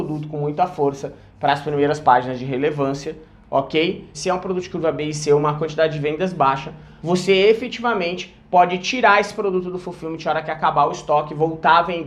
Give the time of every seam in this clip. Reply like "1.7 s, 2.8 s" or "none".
4.1 s, 7.0 s